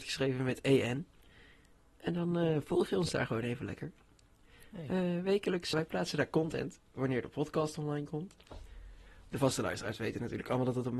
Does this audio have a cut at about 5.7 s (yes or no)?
yes